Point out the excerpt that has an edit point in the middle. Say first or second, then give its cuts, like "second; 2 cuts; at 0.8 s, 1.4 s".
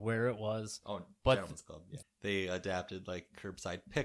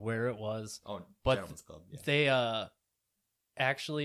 first; 1 cut; at 2.0 s